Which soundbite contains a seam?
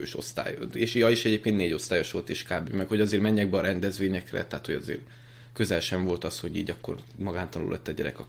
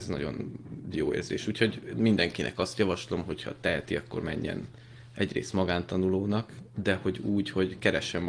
first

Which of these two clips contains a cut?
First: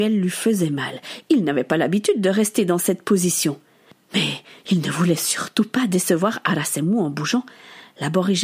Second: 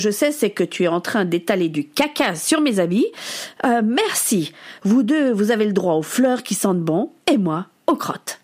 second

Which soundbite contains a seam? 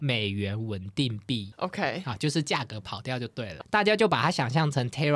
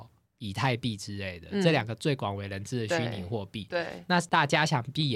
first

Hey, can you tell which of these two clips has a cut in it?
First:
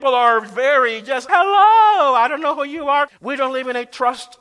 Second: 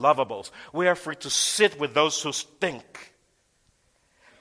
first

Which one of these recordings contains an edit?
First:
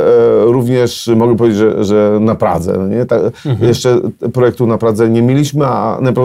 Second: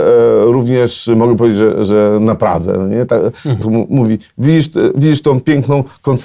second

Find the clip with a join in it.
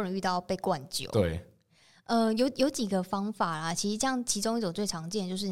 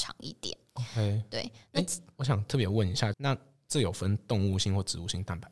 second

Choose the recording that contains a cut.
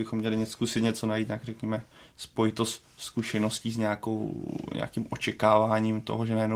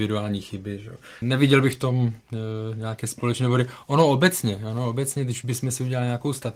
second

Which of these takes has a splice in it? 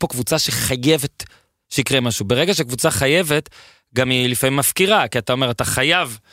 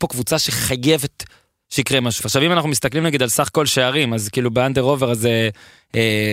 second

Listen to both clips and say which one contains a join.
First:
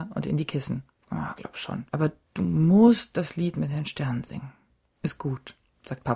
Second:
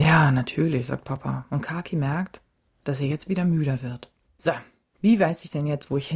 second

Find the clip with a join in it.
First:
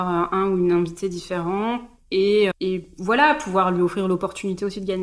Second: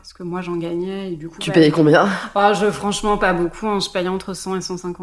first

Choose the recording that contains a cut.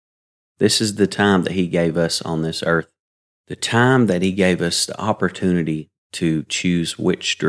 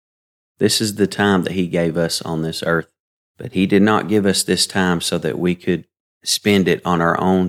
second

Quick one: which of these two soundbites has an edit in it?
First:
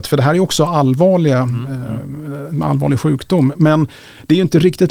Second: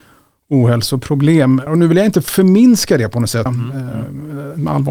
second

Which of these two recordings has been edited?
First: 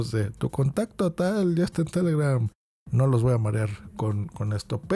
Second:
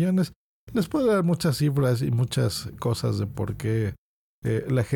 first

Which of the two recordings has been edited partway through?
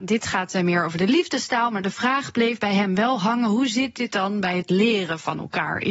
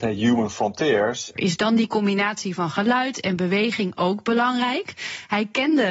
second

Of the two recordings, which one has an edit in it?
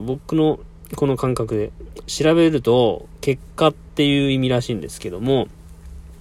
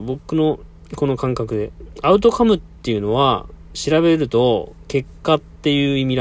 first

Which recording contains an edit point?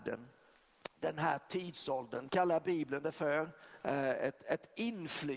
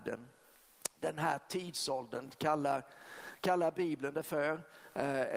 first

